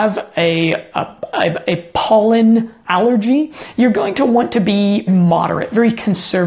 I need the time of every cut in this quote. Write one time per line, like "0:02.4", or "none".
0:02.8
0:05.1